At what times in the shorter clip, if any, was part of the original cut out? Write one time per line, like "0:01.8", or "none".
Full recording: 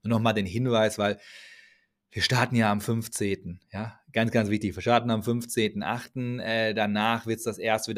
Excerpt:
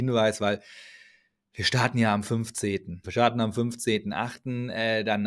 0:03.0